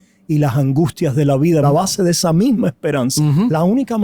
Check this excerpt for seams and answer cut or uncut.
cut